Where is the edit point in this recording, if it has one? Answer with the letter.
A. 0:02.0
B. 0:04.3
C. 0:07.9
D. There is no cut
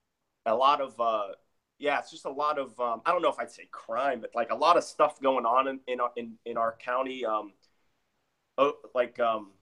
B